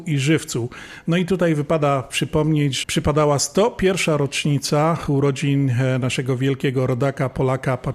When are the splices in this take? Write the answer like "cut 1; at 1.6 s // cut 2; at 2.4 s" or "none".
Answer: cut 1; at 2.8 s